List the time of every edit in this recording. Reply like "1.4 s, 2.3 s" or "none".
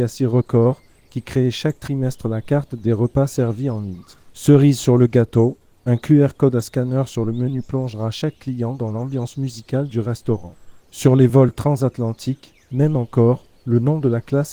4.3 s, 10.8 s, 12.7 s